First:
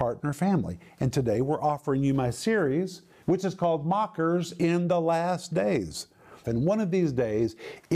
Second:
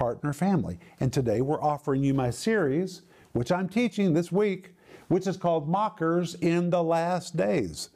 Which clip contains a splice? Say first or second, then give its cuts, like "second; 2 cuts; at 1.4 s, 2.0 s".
first; 2 cuts; at 3.2 s, 6.4 s